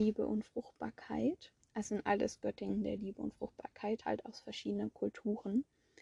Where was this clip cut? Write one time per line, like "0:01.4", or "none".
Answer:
none